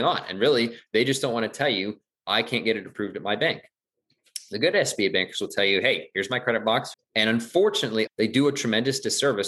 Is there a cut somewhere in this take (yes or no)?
yes